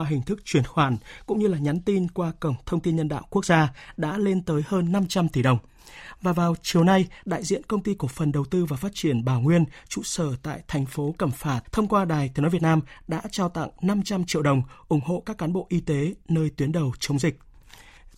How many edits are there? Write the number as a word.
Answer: two